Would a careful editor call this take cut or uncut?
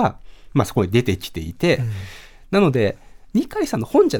uncut